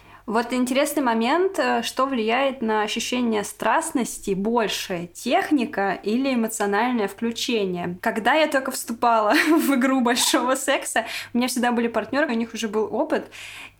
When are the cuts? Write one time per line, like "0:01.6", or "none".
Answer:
0:08.0
0:12.3